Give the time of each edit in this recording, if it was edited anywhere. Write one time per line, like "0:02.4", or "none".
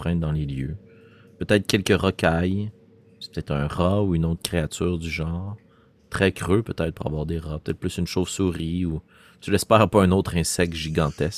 none